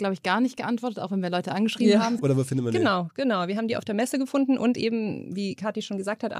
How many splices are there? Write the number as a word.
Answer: one